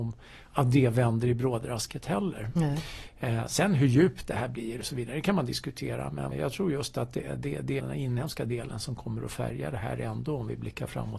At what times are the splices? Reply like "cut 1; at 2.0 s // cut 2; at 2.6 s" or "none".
cut 1; at 6.3 s // cut 2; at 7.8 s